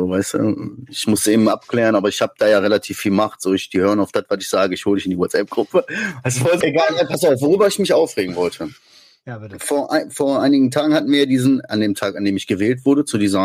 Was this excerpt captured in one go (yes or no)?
no